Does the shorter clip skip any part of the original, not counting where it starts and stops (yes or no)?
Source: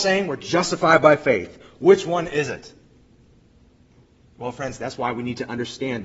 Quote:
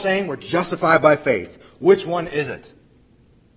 no